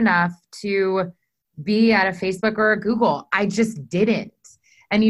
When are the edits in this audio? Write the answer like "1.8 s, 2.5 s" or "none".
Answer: none